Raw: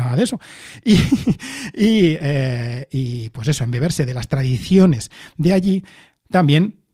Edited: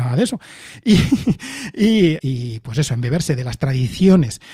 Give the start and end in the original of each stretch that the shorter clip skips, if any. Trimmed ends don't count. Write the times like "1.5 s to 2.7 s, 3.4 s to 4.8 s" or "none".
2.2 s to 2.9 s